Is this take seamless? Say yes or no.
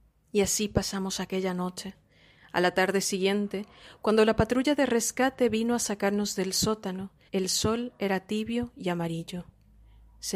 no